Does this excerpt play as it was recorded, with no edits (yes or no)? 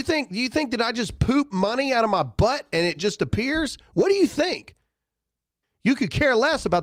no